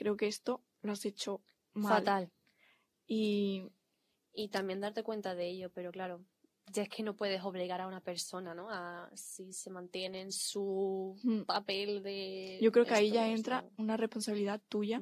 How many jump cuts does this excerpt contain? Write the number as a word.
zero